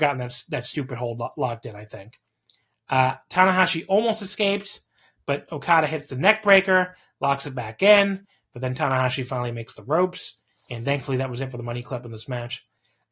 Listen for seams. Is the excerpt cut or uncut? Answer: uncut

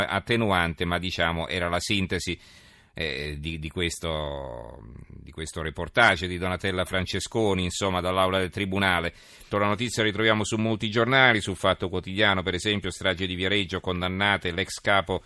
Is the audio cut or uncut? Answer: cut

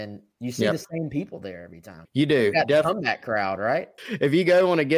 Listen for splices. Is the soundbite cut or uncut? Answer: cut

